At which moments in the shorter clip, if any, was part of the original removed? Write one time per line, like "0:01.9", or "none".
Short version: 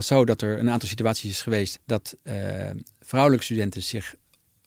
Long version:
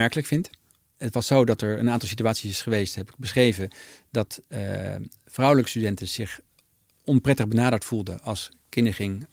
0:01.8